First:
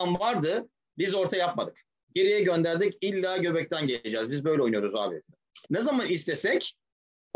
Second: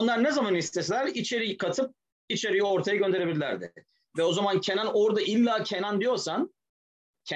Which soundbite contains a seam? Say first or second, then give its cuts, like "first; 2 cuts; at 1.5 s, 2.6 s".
first; 1 cut; at 5.6 s